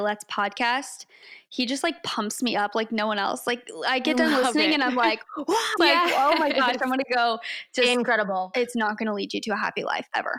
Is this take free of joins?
no; 2 cuts; at 5.8 s, 8.5 s

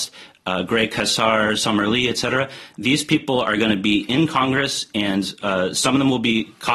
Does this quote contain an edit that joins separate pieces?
no; 0 cuts

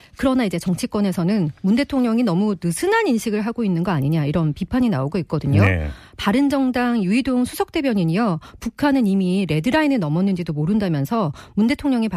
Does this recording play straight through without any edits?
yes; 0 cuts

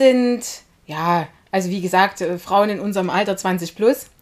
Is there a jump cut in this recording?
no; 0 cuts

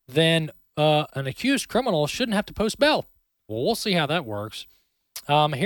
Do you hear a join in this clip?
yes; 2 cuts; at 1.1 s, 3.5 s

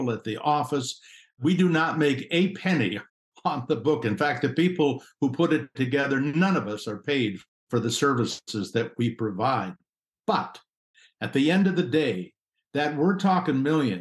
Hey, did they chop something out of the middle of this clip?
no; 0 cuts

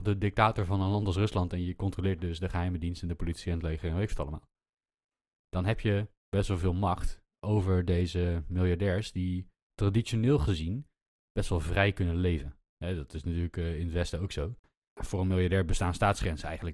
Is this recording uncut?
yes; 0 cuts

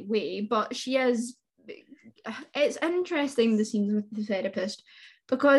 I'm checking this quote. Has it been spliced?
no; 0 cuts

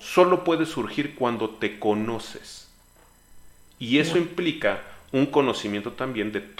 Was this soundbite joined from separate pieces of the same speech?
no; 0 cuts

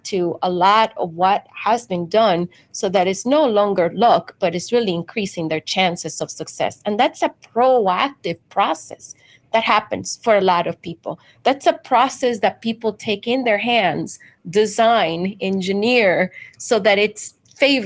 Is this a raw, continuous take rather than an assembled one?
yes; 0 cuts

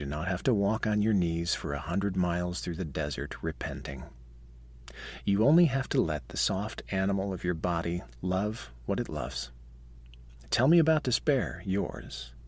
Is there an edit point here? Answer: no; 0 cuts

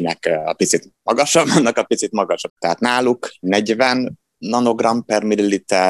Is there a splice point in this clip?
yes; 1 cut; at 2.5 s

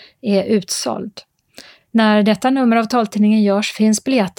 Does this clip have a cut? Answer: no; 0 cuts

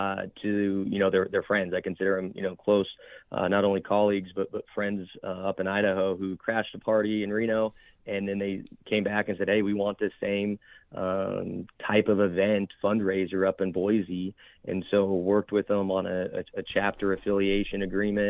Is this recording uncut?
yes; 0 cuts

